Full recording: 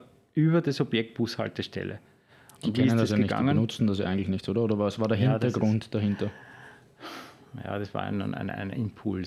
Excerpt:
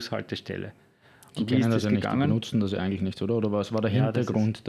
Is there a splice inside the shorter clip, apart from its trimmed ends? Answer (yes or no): no